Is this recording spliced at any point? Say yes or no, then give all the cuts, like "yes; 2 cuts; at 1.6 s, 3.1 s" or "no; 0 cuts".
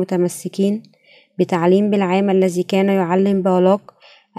no; 0 cuts